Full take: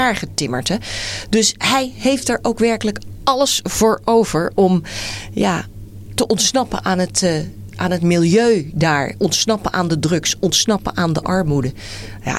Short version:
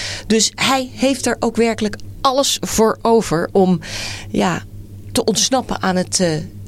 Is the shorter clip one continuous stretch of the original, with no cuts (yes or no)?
yes